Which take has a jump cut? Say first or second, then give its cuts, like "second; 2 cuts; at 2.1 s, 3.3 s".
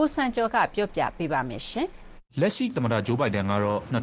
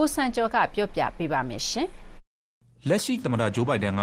first; 1 cut; at 2.3 s